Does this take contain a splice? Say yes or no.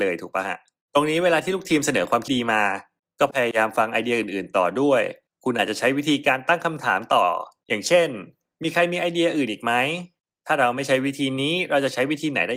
yes